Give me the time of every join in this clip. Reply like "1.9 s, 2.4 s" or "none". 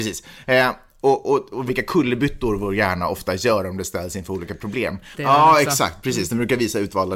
1.7 s, 5.1 s